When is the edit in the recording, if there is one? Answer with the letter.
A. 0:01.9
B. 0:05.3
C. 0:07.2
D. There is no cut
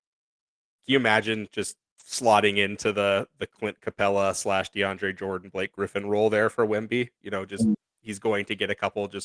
A